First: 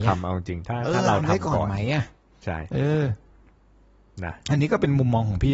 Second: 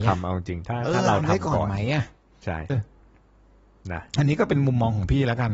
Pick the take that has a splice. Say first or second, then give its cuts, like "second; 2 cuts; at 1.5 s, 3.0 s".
second; 1 cut; at 2.7 s